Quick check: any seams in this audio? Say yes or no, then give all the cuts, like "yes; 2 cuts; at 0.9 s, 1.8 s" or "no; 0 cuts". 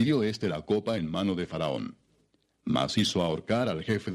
no; 0 cuts